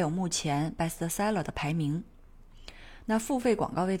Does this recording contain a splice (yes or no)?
no